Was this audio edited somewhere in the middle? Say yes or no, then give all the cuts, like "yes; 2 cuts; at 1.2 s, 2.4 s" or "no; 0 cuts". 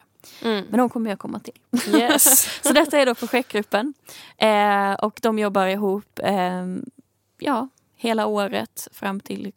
no; 0 cuts